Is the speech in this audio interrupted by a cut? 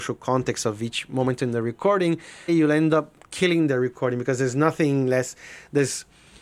yes; 1 cut; at 2.5 s

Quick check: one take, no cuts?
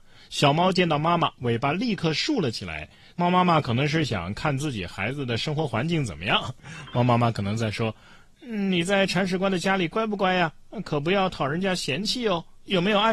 yes; 0 cuts

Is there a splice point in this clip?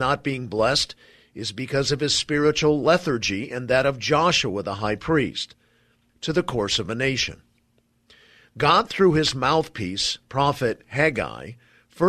yes; 1 cut; at 6.1 s

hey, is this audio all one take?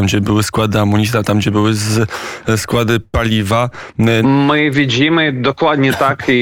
no; 1 cut; at 4.2 s

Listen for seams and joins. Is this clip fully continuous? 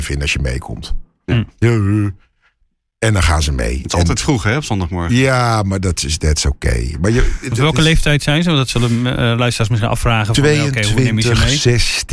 yes; 0 cuts

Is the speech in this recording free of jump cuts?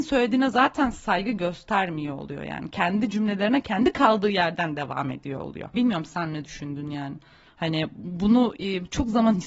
no; 2 cuts; at 5.7 s, 7.5 s

